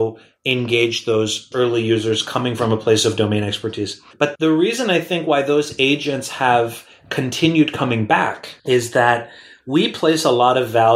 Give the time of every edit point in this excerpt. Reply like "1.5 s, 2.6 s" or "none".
8.6 s

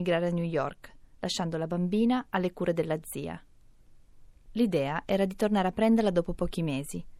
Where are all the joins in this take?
none

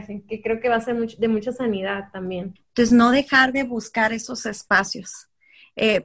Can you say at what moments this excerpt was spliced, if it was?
2.6 s

